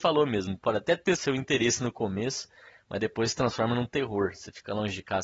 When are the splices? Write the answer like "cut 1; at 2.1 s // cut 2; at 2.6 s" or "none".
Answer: cut 1; at 1.2 s